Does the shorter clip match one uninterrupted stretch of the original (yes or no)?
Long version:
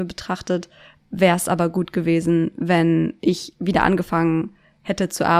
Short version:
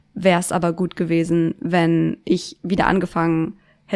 yes